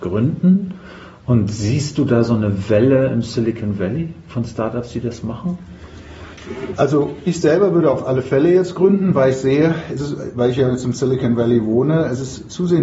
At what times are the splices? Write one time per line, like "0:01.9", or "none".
none